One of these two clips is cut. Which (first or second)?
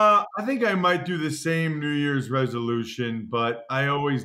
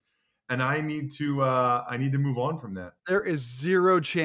second